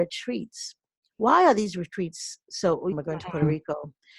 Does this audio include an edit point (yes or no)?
yes